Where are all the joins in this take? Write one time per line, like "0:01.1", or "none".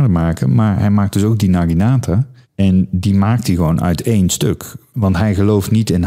0:02.4
0:04.9